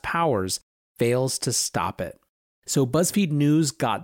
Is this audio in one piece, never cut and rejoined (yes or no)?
yes